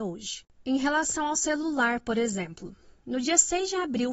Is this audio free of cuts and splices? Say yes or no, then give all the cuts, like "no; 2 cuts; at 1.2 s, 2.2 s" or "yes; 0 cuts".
yes; 0 cuts